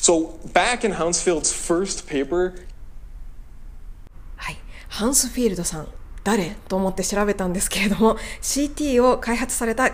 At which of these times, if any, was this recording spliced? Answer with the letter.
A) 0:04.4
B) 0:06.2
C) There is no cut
C